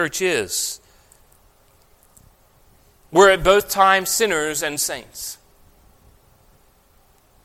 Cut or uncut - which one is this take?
uncut